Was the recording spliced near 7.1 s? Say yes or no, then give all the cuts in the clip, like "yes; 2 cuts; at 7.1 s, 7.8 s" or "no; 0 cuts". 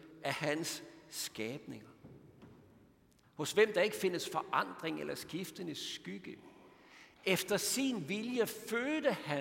no; 1 cut; at 3.2 s